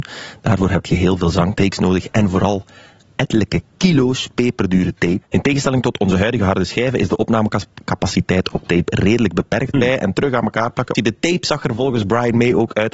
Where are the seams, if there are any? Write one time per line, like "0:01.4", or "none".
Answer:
0:05.2
0:09.7
0:10.9